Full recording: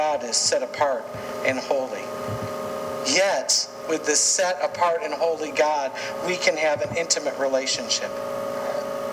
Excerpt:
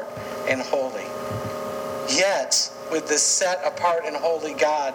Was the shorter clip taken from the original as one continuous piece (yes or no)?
yes